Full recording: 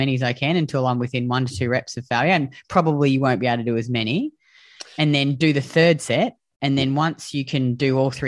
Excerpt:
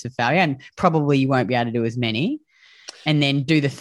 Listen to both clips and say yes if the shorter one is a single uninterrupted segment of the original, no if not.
yes